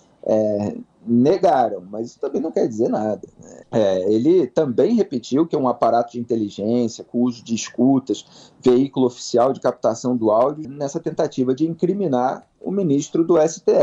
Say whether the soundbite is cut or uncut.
cut